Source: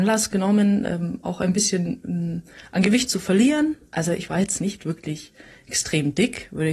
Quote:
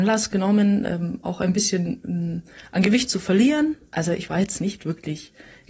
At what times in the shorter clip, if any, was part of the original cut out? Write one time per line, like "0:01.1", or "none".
none